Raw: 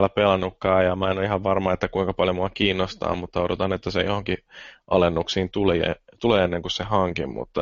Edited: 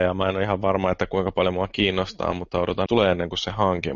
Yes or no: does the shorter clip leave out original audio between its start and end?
yes